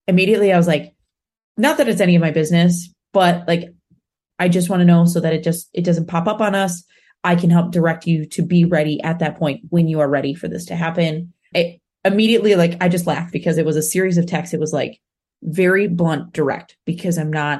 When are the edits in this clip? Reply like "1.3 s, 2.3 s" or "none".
11.5 s